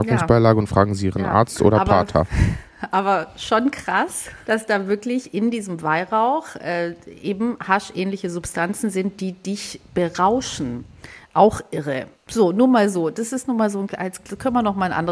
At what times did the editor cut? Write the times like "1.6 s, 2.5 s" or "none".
4.4 s, 12.1 s